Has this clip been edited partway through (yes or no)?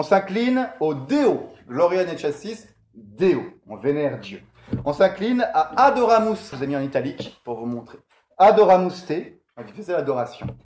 yes